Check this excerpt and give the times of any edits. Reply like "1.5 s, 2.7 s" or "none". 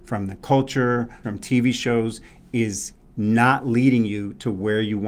1.2 s